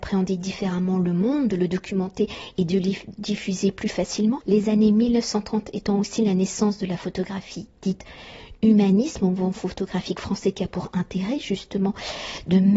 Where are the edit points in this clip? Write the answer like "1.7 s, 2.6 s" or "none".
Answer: none